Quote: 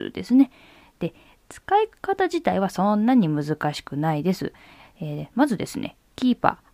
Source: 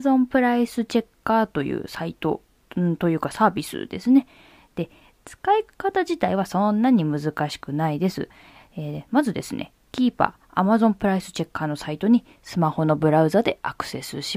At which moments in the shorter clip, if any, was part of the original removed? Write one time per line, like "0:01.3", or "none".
none